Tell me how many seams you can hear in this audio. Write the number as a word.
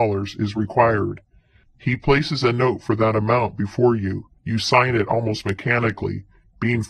two